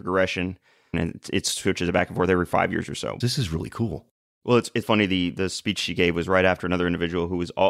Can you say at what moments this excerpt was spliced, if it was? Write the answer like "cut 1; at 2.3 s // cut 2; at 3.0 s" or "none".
cut 1; at 0.9 s // cut 2; at 3.2 s // cut 3; at 4.8 s

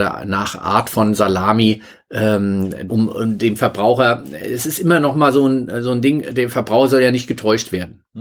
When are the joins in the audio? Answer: cut 1; at 2.9 s

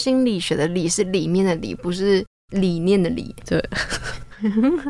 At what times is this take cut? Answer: cut 1; at 3.4 s

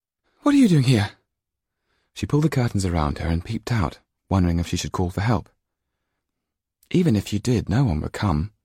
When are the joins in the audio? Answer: none

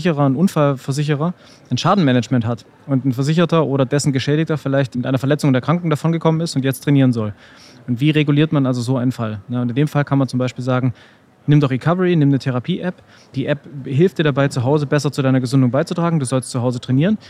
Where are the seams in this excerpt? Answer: none

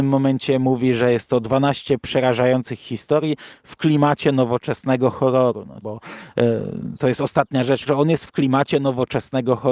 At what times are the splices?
cut 1; at 5.8 s // cut 2; at 7.9 s

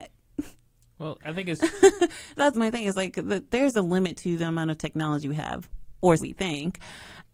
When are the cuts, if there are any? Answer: cut 1; at 2.5 s // cut 2; at 6.2 s

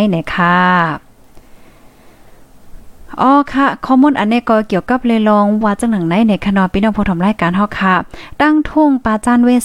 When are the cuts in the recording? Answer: cut 1; at 5.6 s

